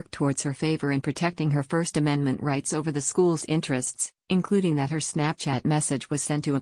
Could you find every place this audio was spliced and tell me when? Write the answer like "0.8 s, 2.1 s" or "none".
none